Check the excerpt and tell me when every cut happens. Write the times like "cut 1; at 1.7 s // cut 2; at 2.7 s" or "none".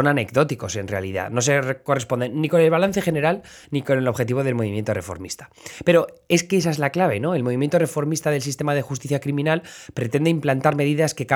none